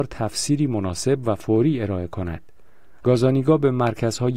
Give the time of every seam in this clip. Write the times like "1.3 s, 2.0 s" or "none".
3.0 s